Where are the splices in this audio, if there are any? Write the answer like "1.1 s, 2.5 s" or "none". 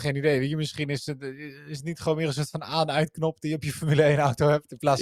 none